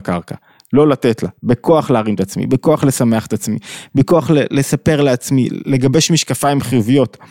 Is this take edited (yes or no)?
no